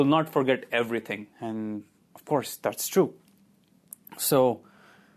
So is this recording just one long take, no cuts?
no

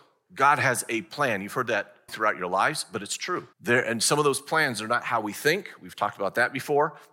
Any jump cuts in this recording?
yes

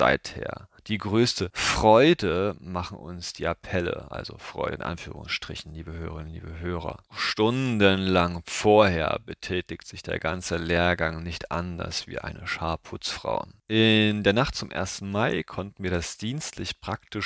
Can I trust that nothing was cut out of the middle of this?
yes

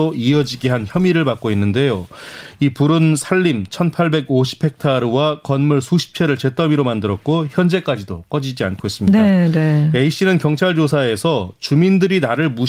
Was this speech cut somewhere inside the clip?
no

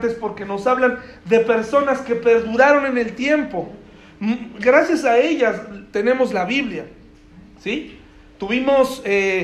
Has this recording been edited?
no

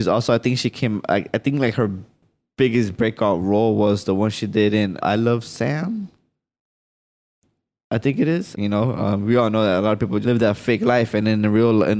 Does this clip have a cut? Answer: yes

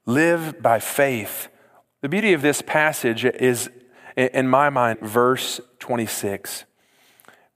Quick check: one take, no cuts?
no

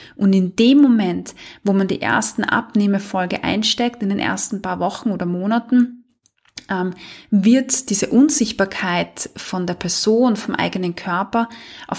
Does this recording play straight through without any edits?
yes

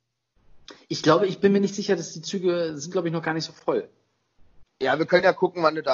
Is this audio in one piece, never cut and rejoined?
no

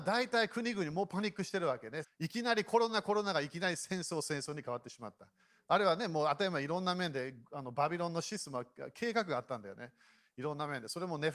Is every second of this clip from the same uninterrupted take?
no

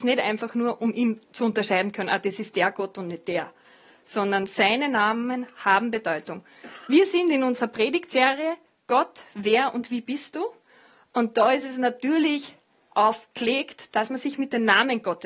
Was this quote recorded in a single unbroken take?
yes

